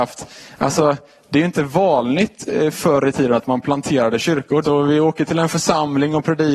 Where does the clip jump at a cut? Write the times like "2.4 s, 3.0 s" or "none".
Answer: 4.6 s